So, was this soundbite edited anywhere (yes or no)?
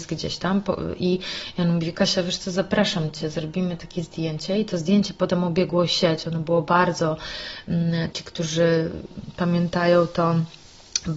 yes